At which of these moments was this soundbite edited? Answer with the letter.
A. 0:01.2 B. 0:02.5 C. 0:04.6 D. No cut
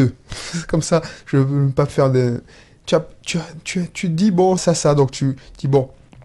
C